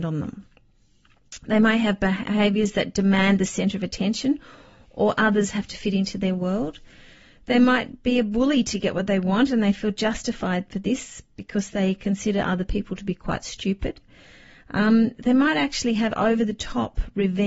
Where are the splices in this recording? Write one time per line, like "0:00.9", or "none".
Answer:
none